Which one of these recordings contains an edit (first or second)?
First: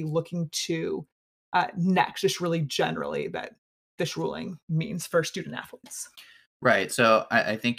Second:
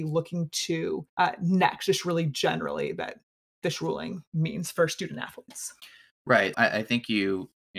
second